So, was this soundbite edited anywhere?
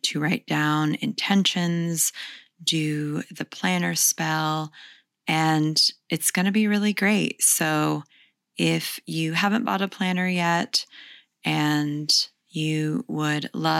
yes; 1 cut; at 5.1 s

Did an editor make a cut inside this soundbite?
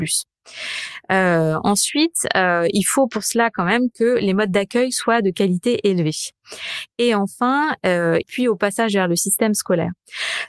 yes; 1 cut; at 8.2 s

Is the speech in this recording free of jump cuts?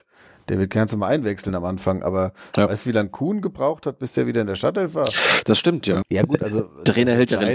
no; 1 cut; at 6.0 s

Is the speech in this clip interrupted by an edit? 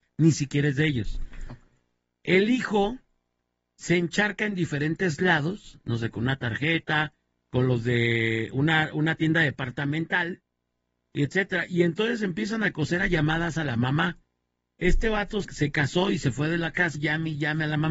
yes; 2 cuts; at 15.4 s, 16.9 s

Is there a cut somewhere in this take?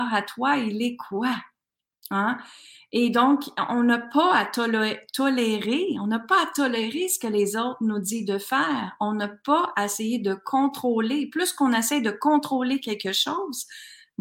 no; 0 cuts

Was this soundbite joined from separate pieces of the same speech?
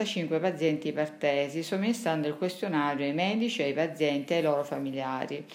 no; 0 cuts

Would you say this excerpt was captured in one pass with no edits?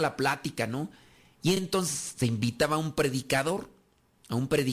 yes; 0 cuts

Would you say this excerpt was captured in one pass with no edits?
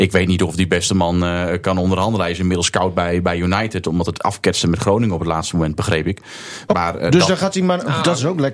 no; 1 cut; at 6.7 s

